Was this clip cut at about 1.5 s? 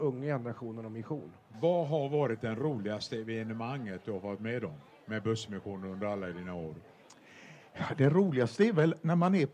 yes; 1 cut; at 1.5 s

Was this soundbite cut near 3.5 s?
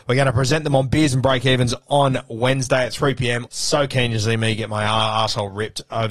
yes; 1 cut; at 3.5 s

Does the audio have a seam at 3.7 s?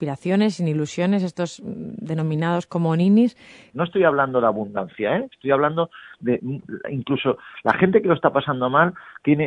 yes; 1 cut; at 3.7 s

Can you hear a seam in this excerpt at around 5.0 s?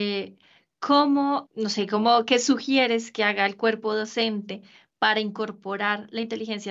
no; 1 cut; at 1.5 s

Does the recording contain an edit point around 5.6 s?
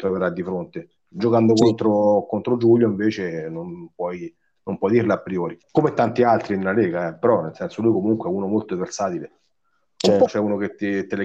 yes; 2 cuts; at 5.6 s, 10.3 s

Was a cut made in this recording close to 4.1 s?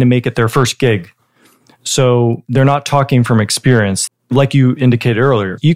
yes; 1 cut; at 4.1 s

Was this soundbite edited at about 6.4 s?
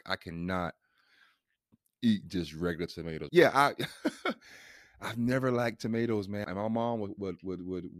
yes; 2 cuts; at 3.3 s, 6.4 s

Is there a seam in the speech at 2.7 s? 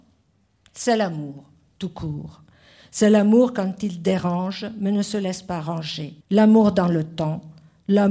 no; 1 cut; at 6.2 s

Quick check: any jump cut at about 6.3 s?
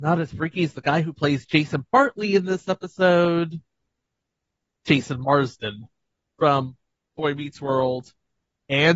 no; 0 cuts

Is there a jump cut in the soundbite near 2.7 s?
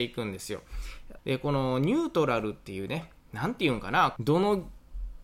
no; 2 cuts; at 1.2 s, 4.2 s

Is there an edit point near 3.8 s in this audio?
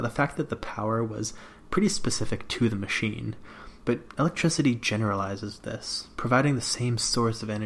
yes; 1 cut; at 3.8 s

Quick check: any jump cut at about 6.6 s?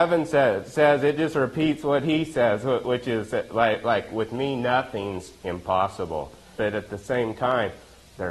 yes; 1 cut; at 6.6 s

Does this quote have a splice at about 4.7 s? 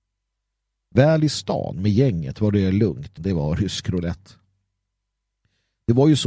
no; 1 cut; at 3.2 s

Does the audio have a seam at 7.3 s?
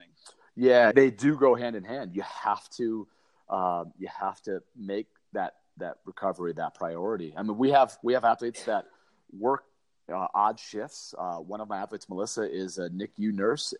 no; 1 cut; at 0.9 s

